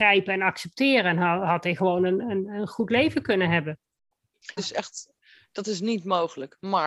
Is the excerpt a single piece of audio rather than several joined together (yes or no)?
no